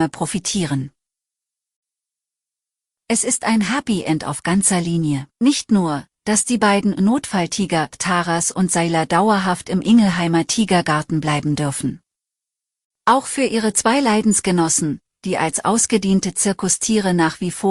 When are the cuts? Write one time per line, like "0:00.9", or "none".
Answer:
0:05.3